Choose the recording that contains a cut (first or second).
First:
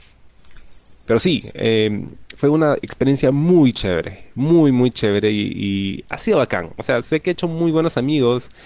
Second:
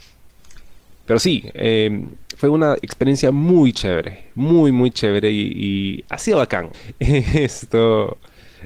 second